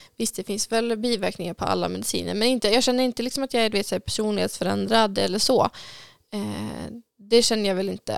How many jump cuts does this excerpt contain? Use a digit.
0